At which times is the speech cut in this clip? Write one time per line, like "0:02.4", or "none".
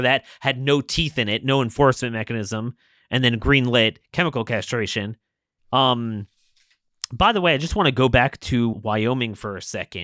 0:05.6
0:08.7